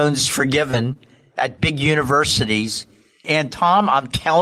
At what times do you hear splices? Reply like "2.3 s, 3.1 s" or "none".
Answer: 3.2 s